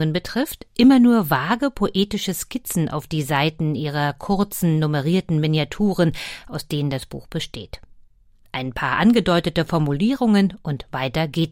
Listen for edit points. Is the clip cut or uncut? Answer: uncut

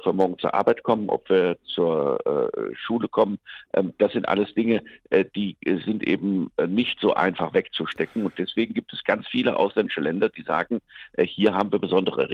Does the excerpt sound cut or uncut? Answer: uncut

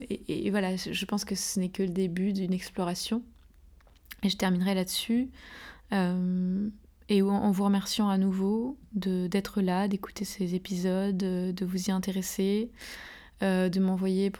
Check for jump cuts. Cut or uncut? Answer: uncut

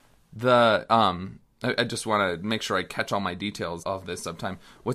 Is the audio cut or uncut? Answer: cut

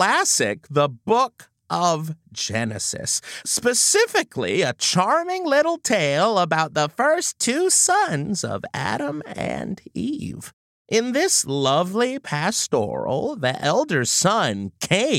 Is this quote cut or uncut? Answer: uncut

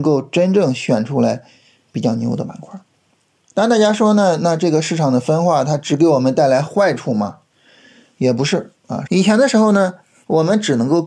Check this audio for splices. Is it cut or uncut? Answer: cut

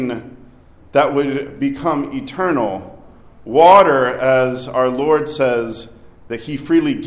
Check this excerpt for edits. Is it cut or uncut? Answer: uncut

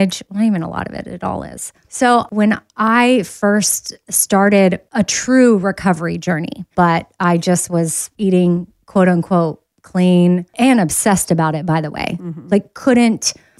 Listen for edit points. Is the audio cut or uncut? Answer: cut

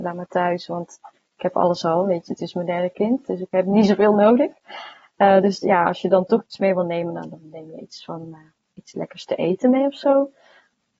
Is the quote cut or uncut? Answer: uncut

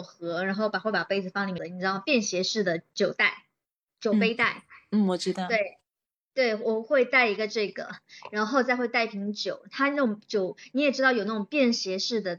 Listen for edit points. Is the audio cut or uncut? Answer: cut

